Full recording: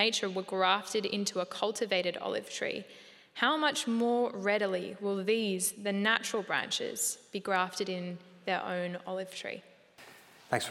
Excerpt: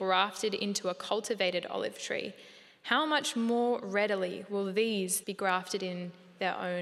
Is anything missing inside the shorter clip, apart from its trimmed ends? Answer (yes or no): yes